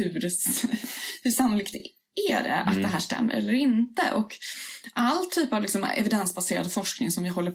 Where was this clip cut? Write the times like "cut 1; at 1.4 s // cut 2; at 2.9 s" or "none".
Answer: none